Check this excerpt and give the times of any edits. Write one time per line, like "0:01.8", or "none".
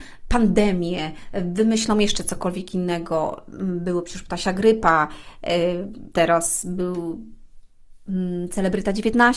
0:06.1